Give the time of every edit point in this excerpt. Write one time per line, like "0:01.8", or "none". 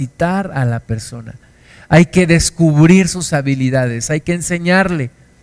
0:04.1